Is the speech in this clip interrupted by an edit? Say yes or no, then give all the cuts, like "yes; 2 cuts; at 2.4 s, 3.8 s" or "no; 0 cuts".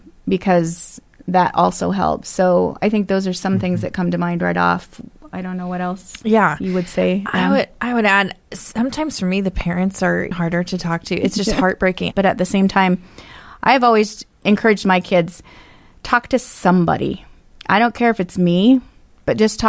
yes; 2 cuts; at 10.3 s, 12.1 s